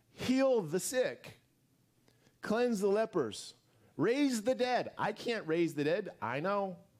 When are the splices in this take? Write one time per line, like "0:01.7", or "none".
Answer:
none